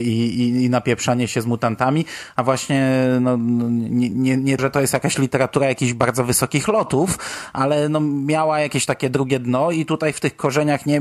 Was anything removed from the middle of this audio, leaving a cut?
yes; 1 cut; at 4.6 s

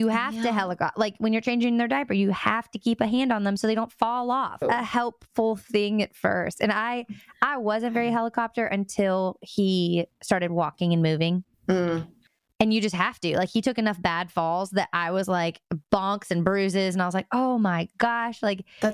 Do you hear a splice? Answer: yes; 1 cut; at 4.6 s

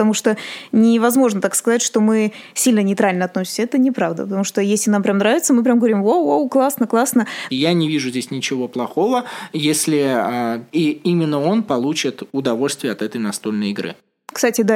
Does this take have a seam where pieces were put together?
yes; 2 cuts; at 7.5 s, 10.7 s

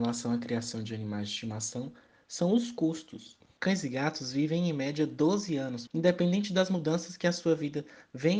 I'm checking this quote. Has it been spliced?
yes; 2 cuts; at 3.6 s, 5.9 s

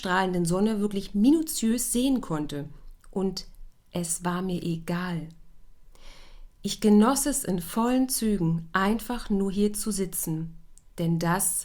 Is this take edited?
no; 0 cuts

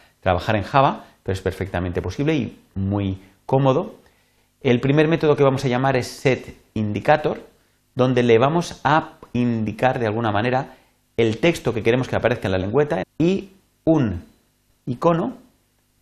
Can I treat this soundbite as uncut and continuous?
no; 1 cut; at 13.0 s

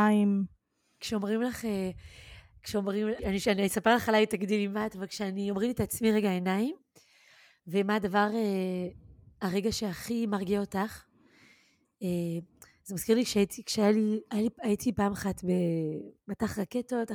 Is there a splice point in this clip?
yes; 1 cut; at 3.2 s

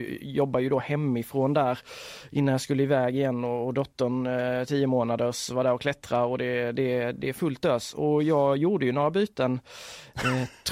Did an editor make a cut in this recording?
no; 0 cuts

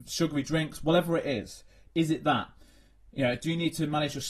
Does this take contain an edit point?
no; 0 cuts

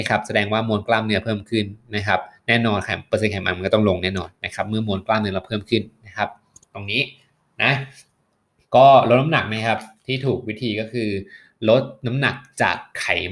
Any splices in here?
no; 0 cuts

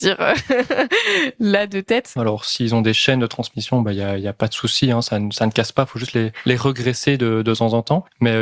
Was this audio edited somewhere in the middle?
yes; 1 cut; at 2.2 s

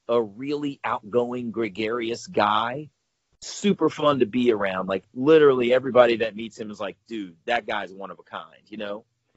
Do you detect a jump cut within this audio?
no; 0 cuts

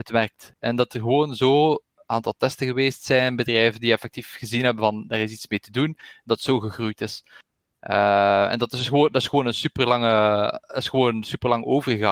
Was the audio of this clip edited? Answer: no; 0 cuts

